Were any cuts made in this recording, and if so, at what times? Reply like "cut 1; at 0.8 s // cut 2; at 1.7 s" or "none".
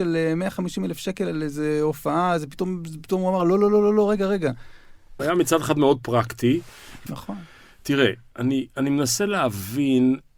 cut 1; at 5.2 s // cut 2; at 7.1 s